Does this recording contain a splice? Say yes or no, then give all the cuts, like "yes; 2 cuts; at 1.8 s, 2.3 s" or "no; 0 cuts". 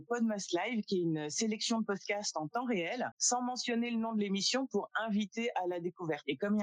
yes; 1 cut; at 3.1 s